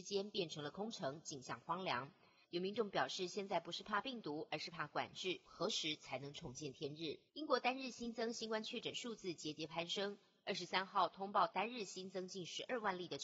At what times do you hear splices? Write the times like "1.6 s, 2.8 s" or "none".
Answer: 2.4 s, 5.5 s, 7.3 s